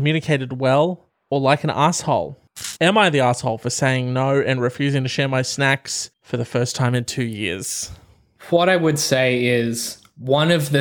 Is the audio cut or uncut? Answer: cut